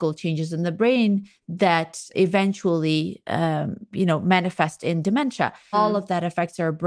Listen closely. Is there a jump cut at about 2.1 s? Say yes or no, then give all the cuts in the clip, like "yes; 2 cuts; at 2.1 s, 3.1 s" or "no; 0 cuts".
yes; 2 cuts; at 2.1 s, 5.7 s